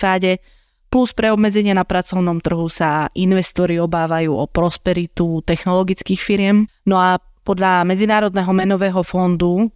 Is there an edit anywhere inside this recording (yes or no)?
yes